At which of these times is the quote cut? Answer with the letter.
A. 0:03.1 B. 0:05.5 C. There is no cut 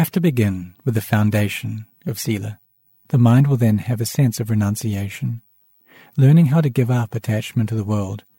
A